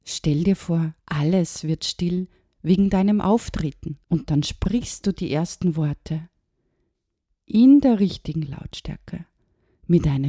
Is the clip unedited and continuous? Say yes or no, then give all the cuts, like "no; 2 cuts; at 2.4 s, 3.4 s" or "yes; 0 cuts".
no; 2 cuts; at 1.0 s, 4.0 s